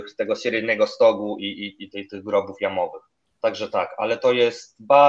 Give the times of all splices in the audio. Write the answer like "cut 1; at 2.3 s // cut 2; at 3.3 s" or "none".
cut 1; at 1.9 s